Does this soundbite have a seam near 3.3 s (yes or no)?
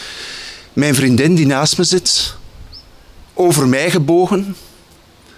yes